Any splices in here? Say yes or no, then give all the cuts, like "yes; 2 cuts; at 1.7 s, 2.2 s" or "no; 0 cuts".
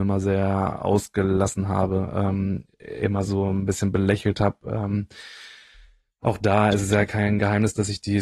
no; 0 cuts